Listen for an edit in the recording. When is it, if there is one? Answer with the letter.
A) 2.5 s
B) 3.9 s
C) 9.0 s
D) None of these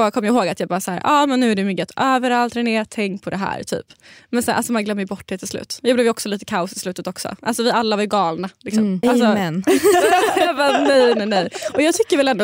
C